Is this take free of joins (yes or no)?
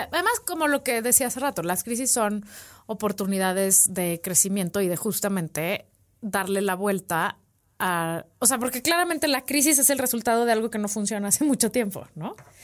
yes